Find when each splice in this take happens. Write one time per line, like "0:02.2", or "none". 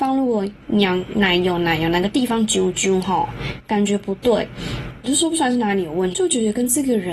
0:05.0
0:06.1

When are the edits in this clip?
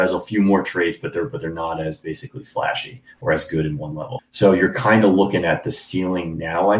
0:04.2

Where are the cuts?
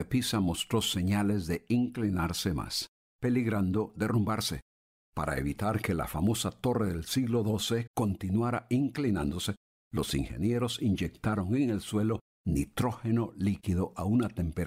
0:07.9

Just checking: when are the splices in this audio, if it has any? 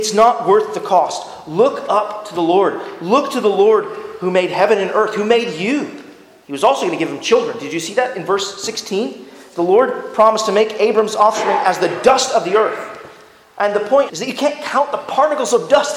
0:06.4
0:14.1

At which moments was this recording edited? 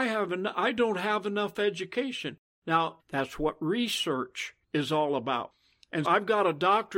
0:03.0
0:04.6
0:06.0

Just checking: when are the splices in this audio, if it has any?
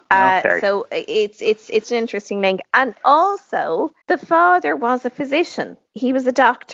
0:01.8
0:04.0

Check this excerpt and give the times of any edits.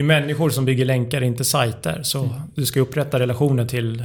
none

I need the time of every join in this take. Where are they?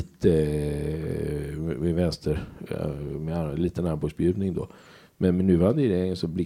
none

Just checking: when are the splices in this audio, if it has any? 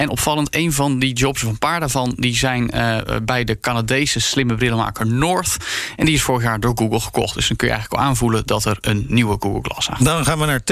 none

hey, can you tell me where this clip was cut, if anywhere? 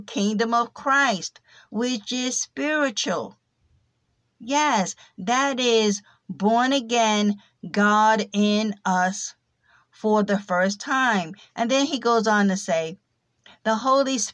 0:11.5

